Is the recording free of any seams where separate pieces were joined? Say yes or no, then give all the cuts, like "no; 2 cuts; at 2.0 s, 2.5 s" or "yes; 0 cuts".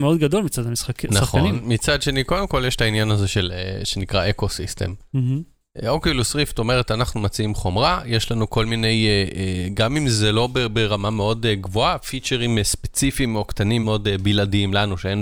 no; 1 cut; at 13.8 s